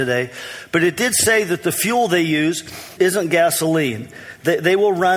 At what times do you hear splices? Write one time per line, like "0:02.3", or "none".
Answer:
0:03.0